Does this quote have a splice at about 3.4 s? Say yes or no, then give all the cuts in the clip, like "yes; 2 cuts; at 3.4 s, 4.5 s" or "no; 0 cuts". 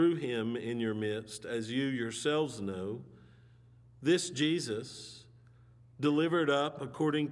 no; 0 cuts